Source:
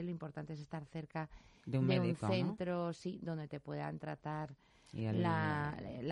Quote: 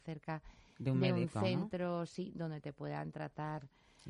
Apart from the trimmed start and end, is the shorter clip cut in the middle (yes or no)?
no